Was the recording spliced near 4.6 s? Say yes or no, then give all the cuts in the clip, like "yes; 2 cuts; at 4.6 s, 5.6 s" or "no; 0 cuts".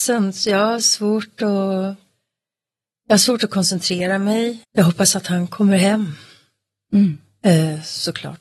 yes; 1 cut; at 4.6 s